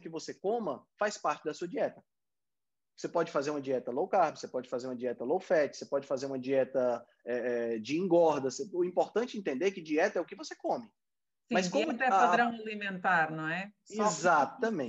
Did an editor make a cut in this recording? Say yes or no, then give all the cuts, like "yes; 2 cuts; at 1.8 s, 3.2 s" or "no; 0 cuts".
no; 0 cuts